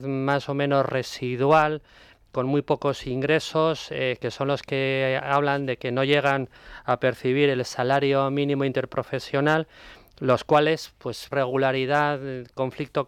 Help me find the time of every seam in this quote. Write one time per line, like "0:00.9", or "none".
0:11.3